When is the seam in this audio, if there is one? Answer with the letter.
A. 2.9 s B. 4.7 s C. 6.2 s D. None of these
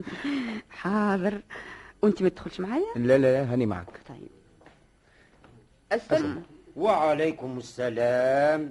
C